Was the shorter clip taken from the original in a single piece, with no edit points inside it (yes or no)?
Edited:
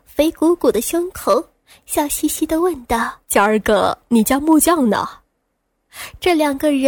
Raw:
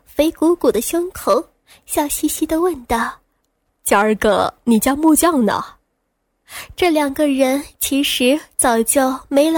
no